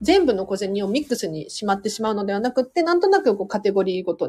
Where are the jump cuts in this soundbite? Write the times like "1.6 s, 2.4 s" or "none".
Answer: none